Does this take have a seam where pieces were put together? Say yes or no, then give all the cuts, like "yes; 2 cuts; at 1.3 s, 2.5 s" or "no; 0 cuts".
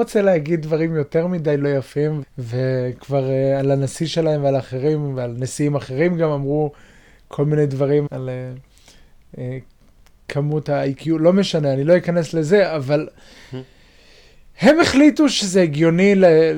yes; 2 cuts; at 2.2 s, 8.1 s